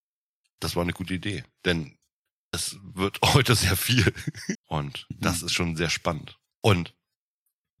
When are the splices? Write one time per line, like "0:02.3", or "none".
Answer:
0:04.6
0:06.5